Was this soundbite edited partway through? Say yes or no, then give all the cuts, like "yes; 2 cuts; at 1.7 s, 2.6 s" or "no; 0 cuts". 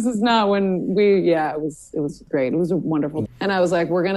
yes; 1 cut; at 3.2 s